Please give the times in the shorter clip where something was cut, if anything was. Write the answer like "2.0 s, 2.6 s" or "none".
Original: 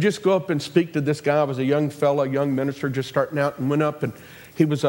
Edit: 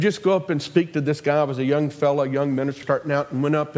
2.8 s